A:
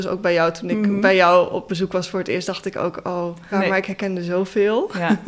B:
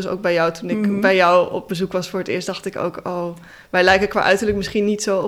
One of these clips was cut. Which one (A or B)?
A